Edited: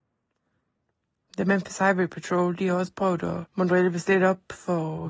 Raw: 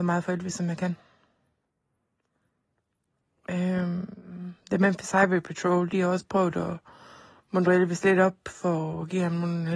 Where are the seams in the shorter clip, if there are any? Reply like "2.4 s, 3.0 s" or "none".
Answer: 1.3 s, 3.5 s